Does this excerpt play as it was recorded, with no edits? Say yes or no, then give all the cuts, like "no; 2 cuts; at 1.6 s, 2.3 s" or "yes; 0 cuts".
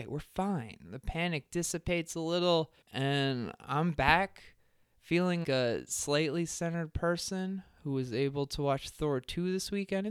no; 2 cuts; at 2.8 s, 5.4 s